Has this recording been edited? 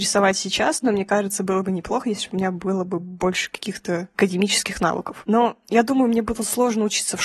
yes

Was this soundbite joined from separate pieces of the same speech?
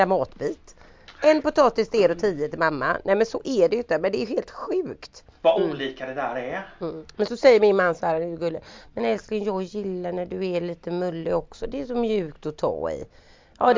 no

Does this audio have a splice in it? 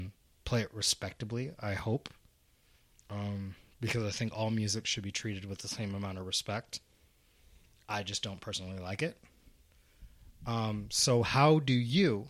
no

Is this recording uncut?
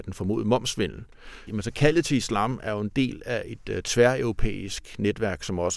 no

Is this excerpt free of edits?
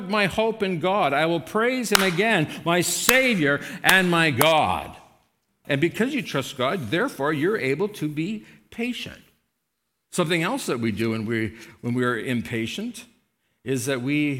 no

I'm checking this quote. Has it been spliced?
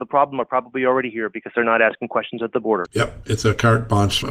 yes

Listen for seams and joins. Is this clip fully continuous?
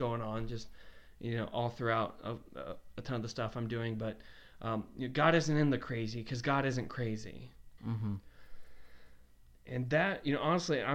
no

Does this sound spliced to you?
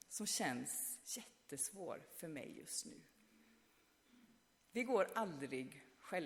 no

